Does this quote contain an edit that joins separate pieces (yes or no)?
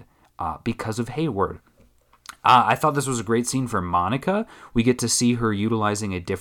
no